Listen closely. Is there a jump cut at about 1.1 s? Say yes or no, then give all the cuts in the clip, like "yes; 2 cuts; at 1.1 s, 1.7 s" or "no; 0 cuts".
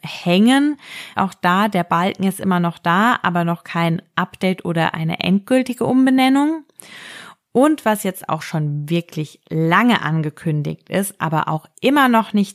yes; 1 cut; at 1.1 s